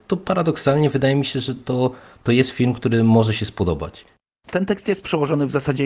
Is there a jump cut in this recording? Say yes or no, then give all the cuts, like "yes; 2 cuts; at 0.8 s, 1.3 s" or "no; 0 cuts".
no; 0 cuts